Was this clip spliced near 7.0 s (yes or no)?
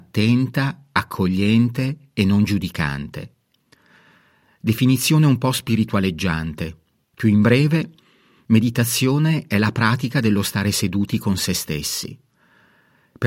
no